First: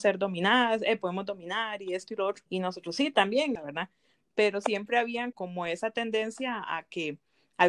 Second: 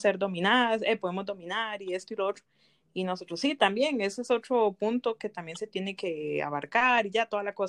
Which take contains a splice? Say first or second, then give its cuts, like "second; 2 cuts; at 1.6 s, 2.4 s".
first; 3 cuts; at 2.5 s, 3.6 s, 5.3 s